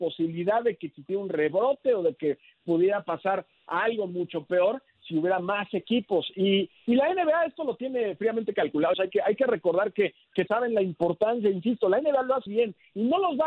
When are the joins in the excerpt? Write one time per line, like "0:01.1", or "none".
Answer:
0:08.9
0:10.5
0:12.5